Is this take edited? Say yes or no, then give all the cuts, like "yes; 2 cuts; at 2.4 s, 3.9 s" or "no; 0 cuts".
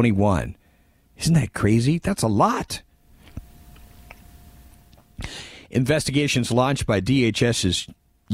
no; 0 cuts